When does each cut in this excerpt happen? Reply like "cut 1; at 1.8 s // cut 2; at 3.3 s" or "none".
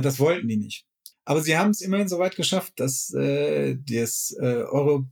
cut 1; at 1.1 s

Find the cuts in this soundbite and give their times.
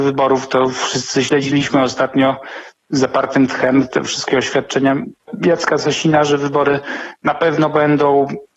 none

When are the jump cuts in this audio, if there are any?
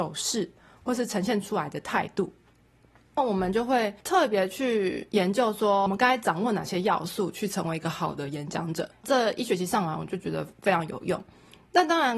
cut 1; at 8.9 s

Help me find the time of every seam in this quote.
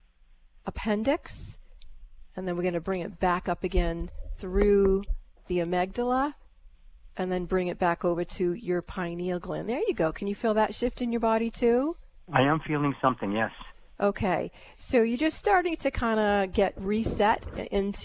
none

